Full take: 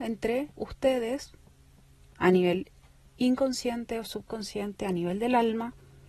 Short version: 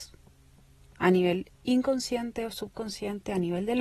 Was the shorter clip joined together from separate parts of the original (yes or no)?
yes